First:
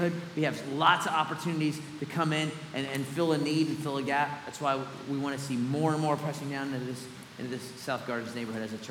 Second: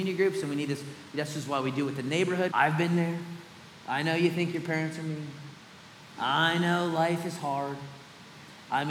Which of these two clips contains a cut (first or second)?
second